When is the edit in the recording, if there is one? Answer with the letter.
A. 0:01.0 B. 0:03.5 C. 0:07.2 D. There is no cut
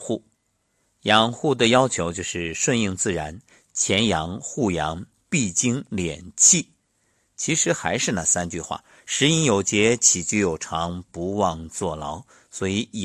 D